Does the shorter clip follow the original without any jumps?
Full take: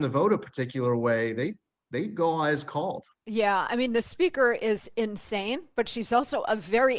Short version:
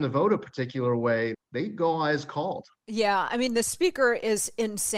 no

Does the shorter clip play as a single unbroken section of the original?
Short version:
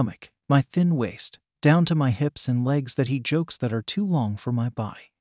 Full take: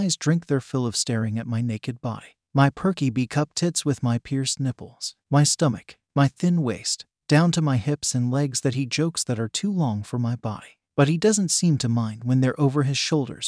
yes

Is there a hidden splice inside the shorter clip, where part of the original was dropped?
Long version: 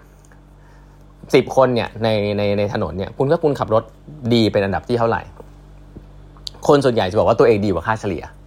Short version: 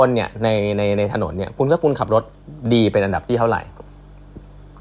no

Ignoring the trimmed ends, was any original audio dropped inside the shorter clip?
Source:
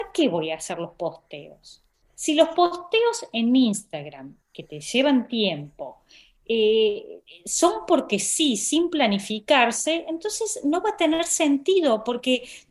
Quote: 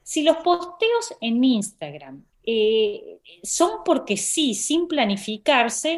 yes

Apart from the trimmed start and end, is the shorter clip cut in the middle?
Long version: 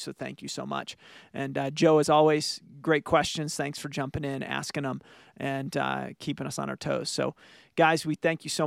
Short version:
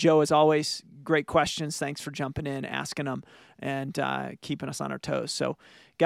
no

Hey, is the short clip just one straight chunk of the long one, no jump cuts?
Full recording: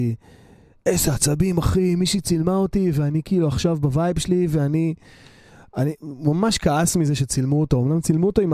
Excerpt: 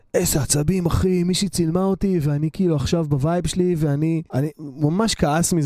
no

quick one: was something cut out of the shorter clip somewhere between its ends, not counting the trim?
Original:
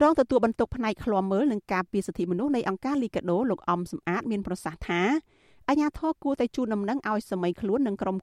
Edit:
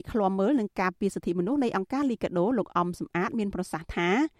no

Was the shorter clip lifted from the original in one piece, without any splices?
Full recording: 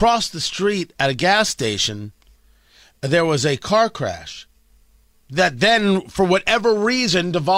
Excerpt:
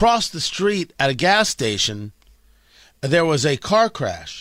yes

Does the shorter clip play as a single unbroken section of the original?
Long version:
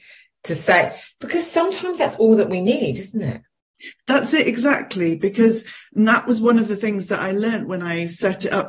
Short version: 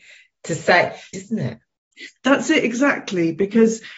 no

